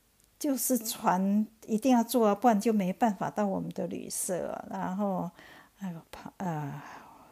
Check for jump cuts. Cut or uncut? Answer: uncut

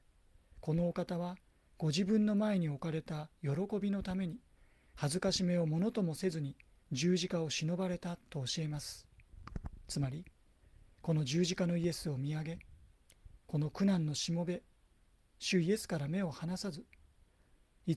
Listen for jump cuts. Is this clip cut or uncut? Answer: uncut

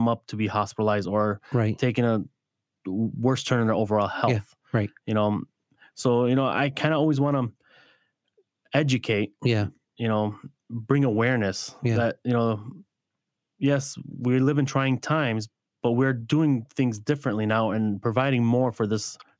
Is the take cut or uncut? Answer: uncut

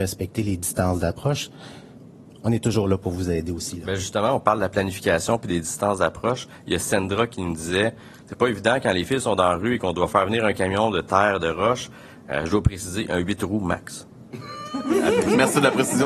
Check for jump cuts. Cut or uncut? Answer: uncut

